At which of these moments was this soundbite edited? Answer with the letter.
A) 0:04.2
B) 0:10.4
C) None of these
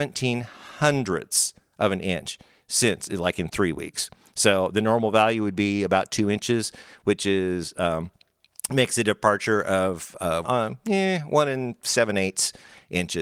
B